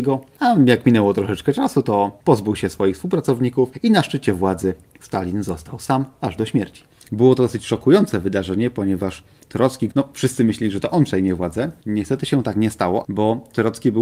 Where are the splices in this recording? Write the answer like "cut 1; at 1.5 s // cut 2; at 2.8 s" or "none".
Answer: cut 1; at 9.9 s // cut 2; at 13.0 s